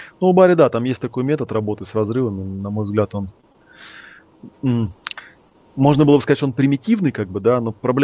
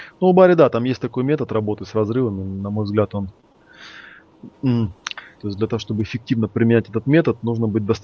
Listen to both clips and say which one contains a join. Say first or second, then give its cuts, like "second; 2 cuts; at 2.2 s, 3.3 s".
second; 1 cut; at 5.4 s